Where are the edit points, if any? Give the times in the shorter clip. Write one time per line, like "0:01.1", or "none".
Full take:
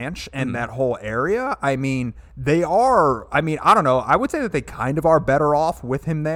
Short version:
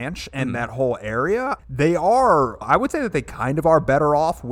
0:01.6
0:02.6